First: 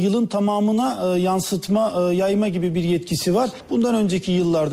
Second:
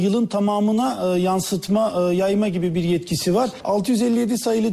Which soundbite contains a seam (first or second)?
second